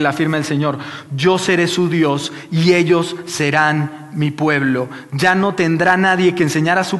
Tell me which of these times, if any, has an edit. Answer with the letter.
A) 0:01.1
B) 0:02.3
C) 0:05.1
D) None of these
A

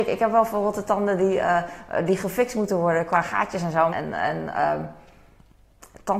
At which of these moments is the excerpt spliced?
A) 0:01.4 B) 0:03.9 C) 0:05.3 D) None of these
B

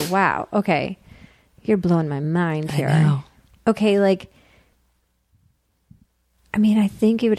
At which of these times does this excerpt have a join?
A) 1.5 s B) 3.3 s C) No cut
C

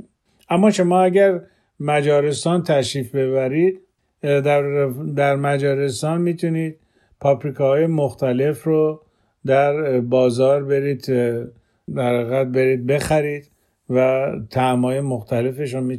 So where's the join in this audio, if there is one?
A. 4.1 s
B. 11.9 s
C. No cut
B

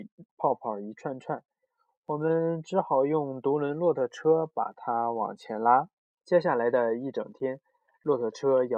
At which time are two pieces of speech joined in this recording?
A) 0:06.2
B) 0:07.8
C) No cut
A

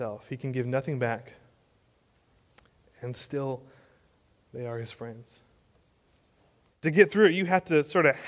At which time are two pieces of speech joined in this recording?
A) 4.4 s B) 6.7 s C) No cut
B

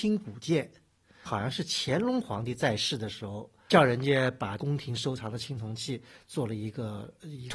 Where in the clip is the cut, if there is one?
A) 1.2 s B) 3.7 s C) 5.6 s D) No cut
A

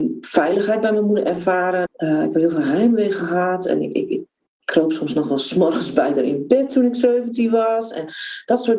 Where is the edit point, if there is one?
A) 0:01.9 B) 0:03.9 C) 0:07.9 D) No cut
A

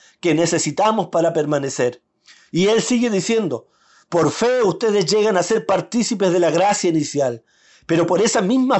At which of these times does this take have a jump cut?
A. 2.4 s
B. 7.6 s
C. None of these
C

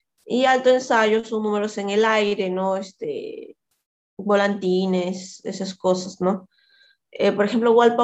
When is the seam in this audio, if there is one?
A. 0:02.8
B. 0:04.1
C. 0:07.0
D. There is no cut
D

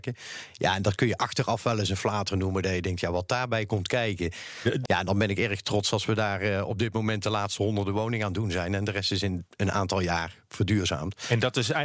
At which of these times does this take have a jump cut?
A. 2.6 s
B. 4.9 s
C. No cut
B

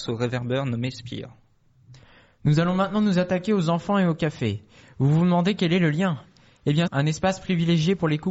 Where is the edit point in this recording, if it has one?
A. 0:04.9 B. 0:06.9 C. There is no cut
B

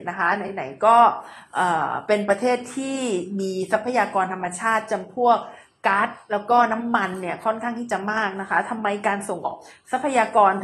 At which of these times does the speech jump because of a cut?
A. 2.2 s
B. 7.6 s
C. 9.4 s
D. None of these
C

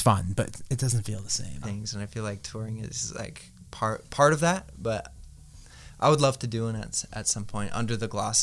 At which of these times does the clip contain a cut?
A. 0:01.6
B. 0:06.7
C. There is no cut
A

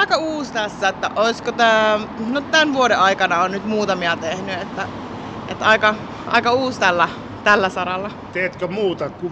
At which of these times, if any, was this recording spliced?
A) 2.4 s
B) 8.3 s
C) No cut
A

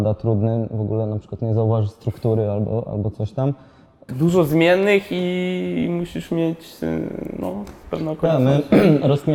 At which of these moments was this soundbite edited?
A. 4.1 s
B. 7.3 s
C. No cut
A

